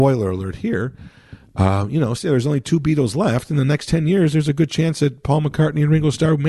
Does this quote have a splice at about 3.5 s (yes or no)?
no